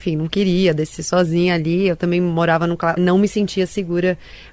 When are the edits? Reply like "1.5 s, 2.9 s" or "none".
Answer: 3.0 s